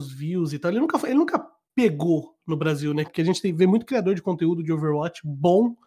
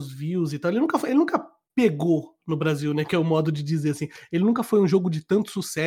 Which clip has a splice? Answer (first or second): first